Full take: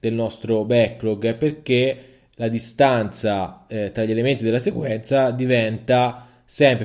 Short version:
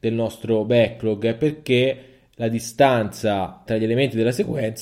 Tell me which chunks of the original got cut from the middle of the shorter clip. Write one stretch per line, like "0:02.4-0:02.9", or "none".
0:03.7-0:03.9

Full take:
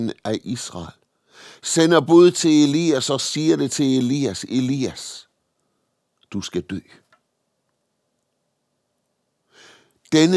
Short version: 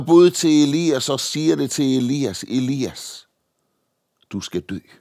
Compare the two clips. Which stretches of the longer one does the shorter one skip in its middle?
none

